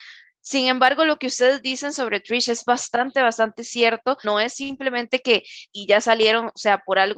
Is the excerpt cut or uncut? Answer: cut